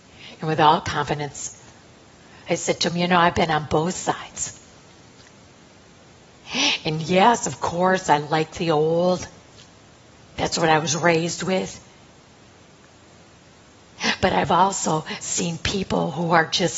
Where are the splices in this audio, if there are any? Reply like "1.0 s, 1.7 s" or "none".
none